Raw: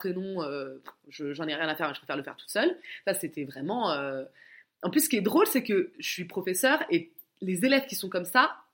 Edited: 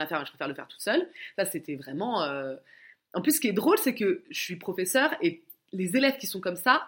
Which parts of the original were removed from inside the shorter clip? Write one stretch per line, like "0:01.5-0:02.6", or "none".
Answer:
none